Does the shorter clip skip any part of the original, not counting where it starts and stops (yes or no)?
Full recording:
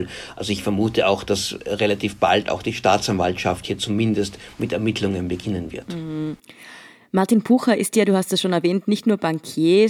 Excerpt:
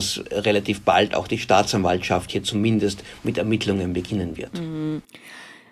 no